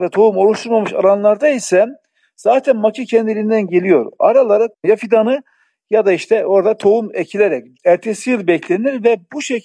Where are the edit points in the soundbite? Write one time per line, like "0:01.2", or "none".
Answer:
0:07.7